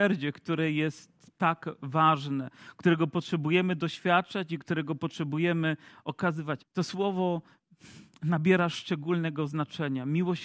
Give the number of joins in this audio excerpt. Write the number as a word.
one